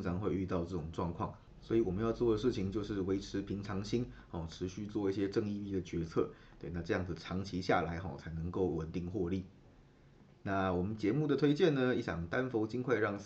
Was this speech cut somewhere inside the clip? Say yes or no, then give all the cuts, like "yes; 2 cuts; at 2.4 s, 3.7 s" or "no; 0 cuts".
no; 0 cuts